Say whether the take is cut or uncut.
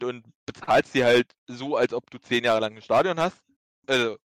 uncut